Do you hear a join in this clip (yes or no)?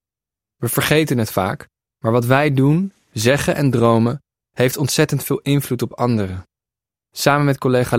no